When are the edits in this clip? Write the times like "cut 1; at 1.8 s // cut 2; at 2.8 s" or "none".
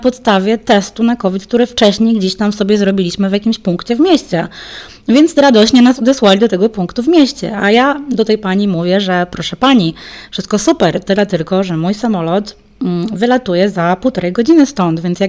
none